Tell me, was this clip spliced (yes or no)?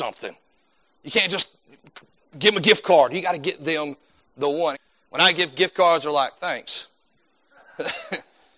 yes